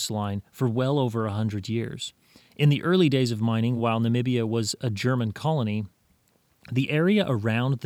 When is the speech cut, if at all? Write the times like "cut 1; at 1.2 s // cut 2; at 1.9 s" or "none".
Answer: none